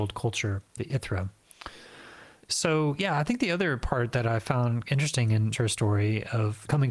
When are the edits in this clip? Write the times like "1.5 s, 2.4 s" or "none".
2.4 s, 5.5 s